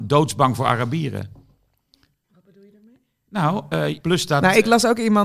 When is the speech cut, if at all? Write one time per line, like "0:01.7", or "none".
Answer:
0:04.0